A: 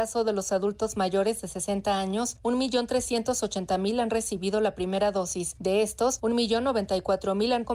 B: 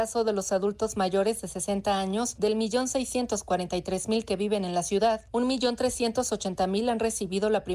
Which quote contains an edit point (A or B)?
A